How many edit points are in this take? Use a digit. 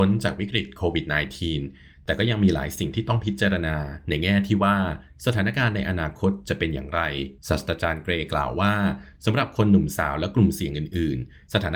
1